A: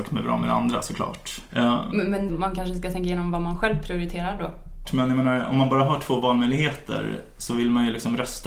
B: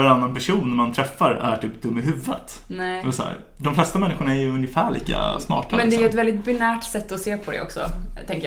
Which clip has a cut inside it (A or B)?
A